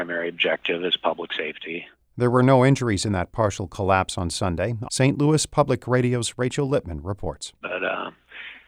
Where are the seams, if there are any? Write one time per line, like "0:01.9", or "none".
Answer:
0:04.8
0:07.6